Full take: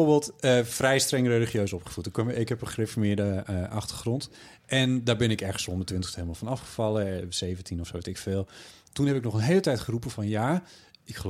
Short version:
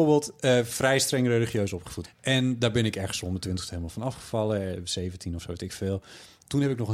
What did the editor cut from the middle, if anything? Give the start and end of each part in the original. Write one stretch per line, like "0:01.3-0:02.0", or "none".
0:02.0-0:04.5